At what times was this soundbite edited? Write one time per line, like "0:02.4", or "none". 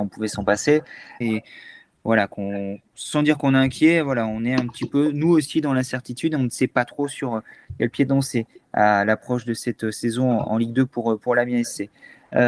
0:01.2